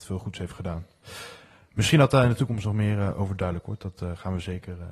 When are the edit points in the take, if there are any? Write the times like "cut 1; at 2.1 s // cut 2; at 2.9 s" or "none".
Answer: none

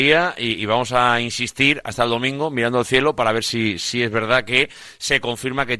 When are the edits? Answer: none

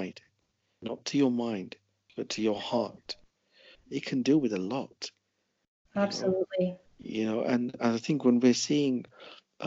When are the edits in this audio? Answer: cut 1; at 3.7 s

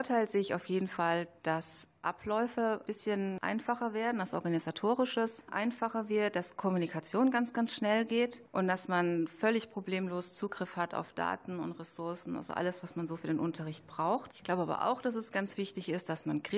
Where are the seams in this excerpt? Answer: none

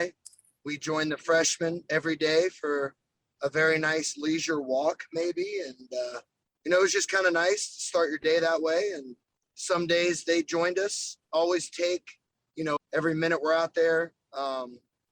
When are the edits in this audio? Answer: cut 1; at 11.2 s // cut 2; at 12.8 s

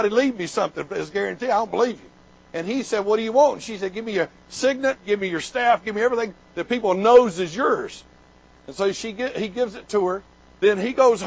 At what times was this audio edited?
none

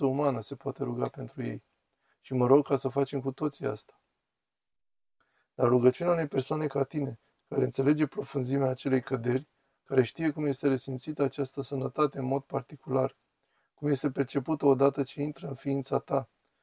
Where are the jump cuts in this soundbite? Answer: none

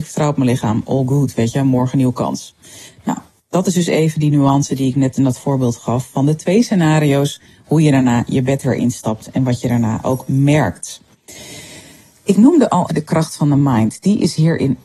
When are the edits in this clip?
cut 1; at 12.9 s

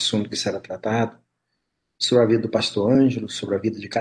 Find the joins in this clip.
none

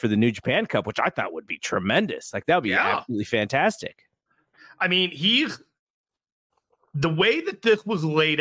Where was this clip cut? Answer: none

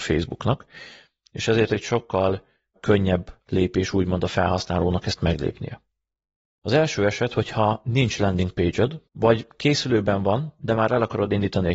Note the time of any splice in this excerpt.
cut 1; at 6.6 s // cut 2; at 9.1 s

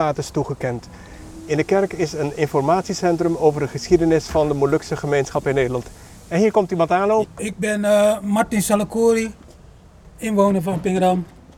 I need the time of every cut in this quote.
cut 1; at 7.2 s

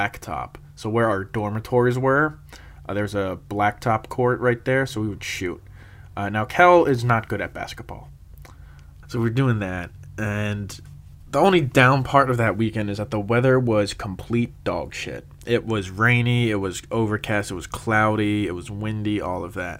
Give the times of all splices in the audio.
cut 1; at 9.0 s

